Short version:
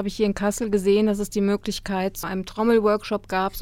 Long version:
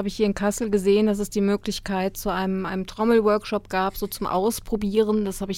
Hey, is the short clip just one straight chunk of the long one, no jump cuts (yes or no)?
no